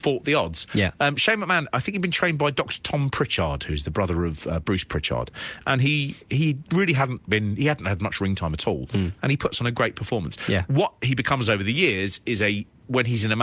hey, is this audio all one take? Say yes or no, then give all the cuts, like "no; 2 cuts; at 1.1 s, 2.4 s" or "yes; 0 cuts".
yes; 0 cuts